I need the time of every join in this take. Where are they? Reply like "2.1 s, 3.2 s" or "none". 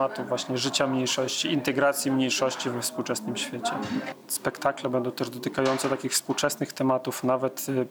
none